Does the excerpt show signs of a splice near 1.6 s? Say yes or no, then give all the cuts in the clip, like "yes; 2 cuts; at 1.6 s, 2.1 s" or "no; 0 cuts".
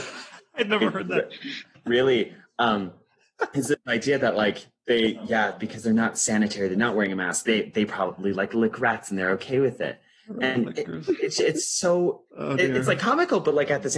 no; 1 cut; at 12.3 s